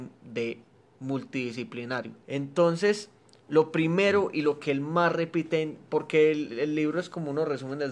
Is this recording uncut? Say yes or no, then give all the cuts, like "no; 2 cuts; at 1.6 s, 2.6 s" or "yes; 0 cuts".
no; 1 cut; at 2.2 s